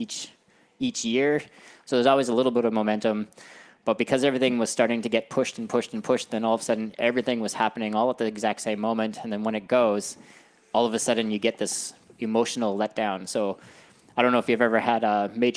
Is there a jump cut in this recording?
no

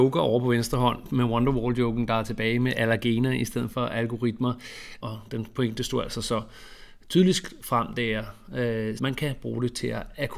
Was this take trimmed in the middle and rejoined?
yes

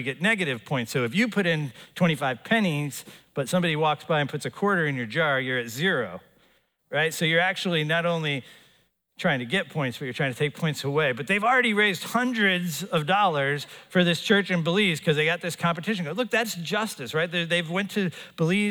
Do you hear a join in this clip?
no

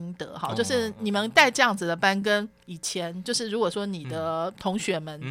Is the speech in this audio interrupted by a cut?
no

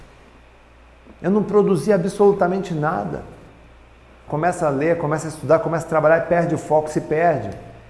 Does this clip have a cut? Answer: yes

